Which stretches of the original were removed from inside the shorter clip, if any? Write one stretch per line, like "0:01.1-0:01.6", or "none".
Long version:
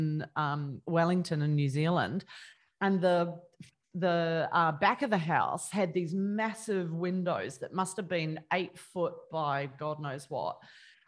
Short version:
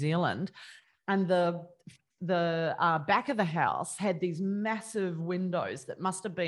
none

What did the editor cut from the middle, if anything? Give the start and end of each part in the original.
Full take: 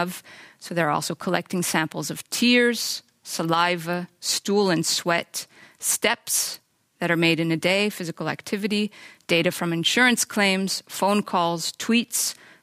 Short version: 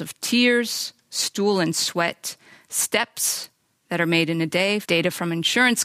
0:03.2-0:04.2
0:07.9-0:09.2

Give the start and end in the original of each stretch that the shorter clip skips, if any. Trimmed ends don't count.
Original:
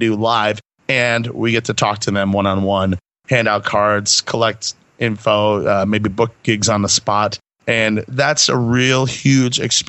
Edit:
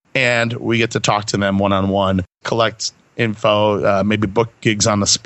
0:03.1-0:04.2

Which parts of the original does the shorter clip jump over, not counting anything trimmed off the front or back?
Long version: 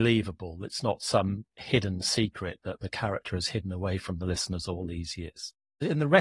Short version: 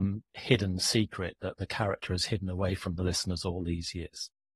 none

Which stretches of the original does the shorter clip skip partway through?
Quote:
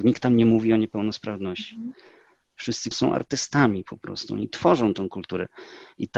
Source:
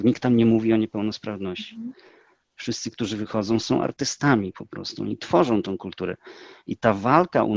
0:02.9-0:03.6

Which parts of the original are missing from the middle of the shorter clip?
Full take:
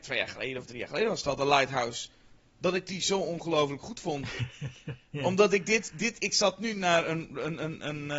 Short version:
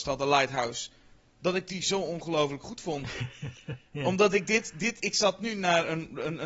none

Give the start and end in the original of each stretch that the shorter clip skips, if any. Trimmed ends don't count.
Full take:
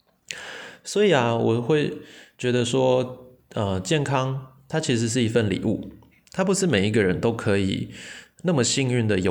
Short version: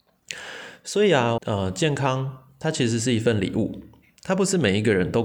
0:01.4-0:03.5

